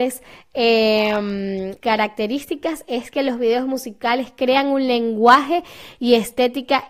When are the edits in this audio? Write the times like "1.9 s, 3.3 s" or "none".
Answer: 1.8 s